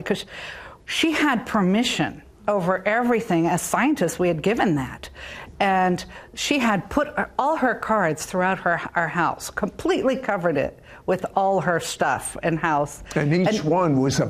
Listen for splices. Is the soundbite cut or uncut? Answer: uncut